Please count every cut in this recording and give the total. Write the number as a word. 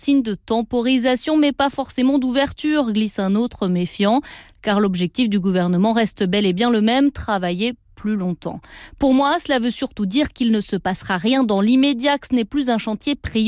zero